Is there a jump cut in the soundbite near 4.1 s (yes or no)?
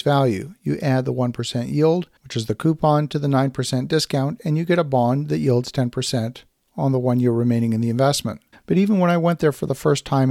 no